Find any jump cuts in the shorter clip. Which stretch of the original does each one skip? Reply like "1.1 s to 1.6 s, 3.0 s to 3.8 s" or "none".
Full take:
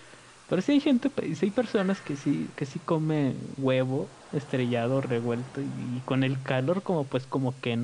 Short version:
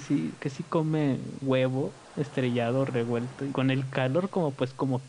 5.7 s to 6.0 s